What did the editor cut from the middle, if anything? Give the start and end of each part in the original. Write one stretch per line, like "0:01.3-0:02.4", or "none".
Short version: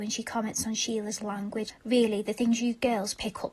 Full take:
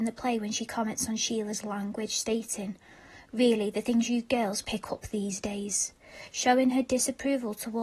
0:02.1-0:03.2